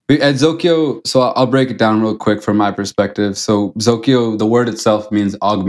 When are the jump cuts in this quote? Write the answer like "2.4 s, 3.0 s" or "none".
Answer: none